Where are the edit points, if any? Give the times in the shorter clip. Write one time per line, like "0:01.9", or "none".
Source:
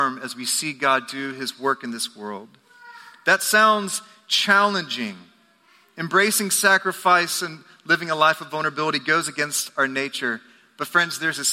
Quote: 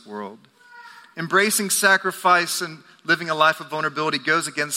0:01.1